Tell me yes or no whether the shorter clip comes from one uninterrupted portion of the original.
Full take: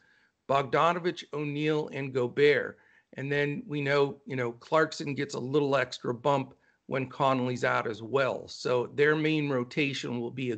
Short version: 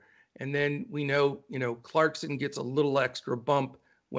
yes